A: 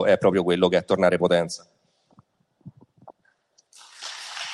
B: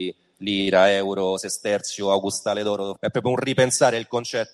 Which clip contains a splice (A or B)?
B